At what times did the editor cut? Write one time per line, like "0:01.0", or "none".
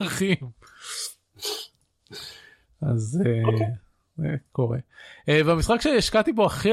none